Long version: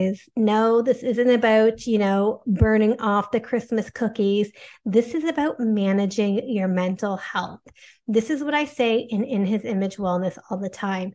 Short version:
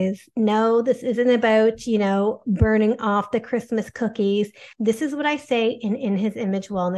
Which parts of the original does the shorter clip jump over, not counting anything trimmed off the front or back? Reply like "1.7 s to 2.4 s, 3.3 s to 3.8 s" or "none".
4.7 s to 8.0 s